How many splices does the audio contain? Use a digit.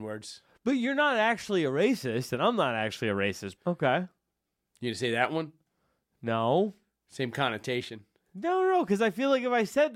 1